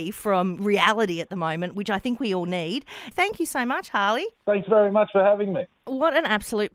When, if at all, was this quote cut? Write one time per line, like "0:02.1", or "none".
0:03.1
0:04.3